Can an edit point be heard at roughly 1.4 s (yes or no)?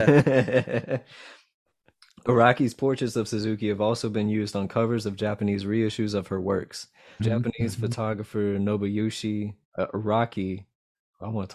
no